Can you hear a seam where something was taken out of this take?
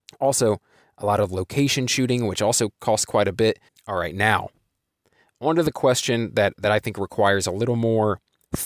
yes; 1 cut; at 3.7 s

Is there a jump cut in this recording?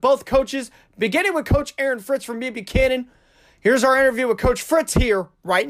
no; 0 cuts

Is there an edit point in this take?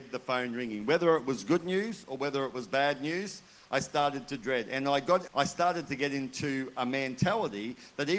yes; 1 cut; at 5.3 s

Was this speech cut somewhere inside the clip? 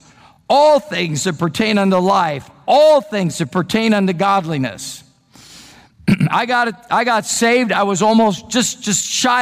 no; 0 cuts

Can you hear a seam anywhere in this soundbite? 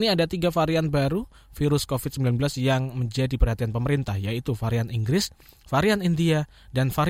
no; 0 cuts

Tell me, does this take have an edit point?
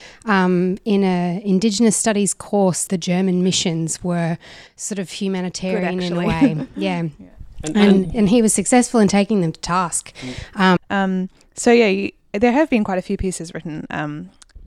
yes; 2 cuts; at 2.9 s, 10.8 s

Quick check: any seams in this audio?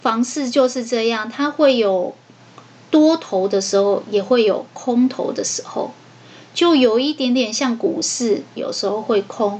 yes; 1 cut; at 8.6 s

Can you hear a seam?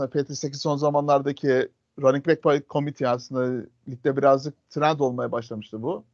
no; 0 cuts

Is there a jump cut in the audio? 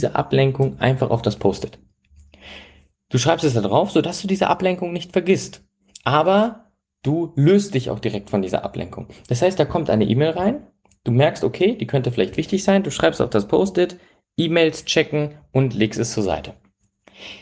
no; 0 cuts

